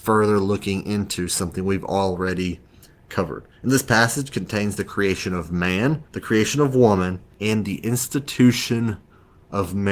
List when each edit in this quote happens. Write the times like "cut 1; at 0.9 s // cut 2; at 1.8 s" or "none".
cut 1; at 6.1 s // cut 2; at 7.3 s